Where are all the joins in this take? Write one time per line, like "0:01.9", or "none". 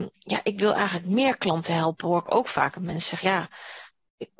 none